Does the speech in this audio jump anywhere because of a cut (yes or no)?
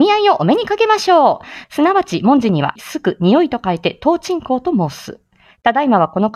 yes